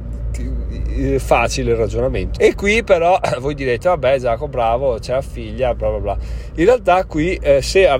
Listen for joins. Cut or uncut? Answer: cut